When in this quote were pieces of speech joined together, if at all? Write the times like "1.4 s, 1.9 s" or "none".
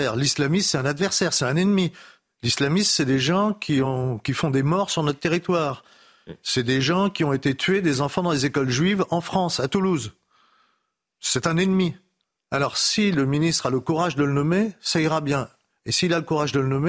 none

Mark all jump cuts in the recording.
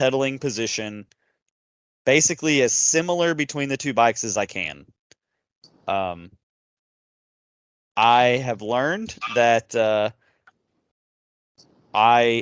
none

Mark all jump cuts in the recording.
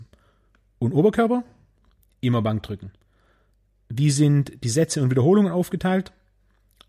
none

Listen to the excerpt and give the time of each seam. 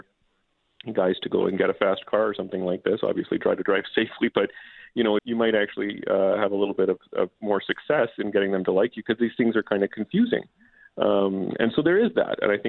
5.2 s

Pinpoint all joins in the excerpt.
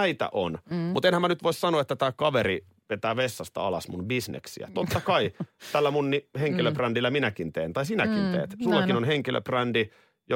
none

